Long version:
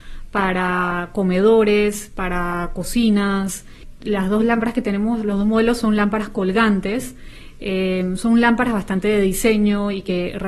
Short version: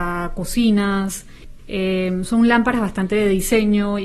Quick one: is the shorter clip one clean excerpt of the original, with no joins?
no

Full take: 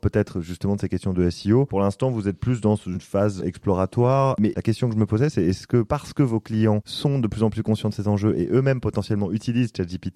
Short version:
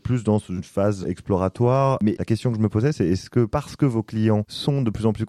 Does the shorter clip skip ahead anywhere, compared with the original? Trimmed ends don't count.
no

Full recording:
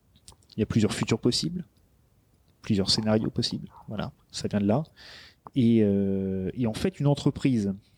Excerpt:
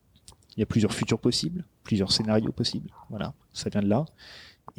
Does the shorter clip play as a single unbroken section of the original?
no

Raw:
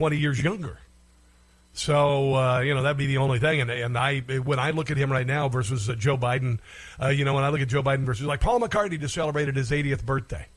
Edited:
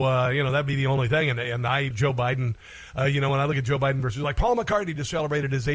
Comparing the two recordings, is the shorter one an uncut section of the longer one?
no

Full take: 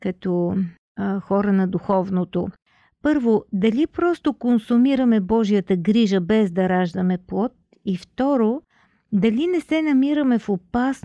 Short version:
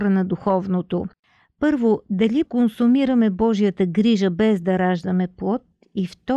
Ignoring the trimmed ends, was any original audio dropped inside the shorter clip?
yes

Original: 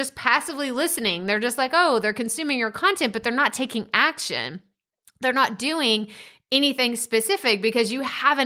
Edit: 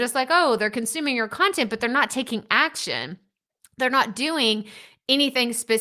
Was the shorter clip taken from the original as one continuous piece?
yes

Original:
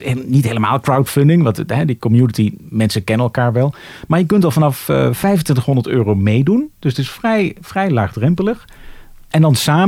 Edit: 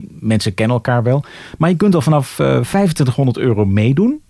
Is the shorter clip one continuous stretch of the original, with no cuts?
yes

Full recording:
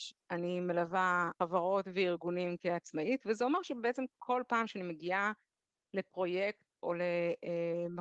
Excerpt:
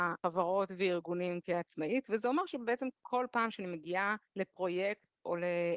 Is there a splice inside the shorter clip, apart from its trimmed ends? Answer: yes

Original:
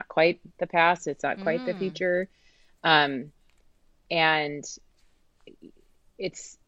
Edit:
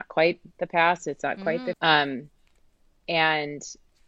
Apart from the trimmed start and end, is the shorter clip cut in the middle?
yes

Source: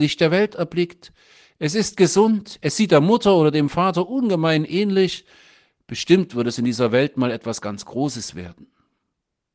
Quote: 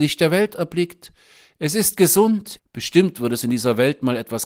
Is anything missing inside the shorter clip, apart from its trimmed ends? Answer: yes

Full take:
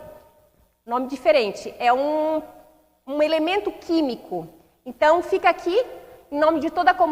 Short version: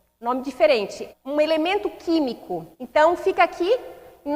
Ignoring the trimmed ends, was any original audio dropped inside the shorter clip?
yes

